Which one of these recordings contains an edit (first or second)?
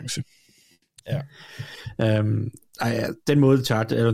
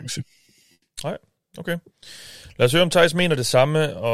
first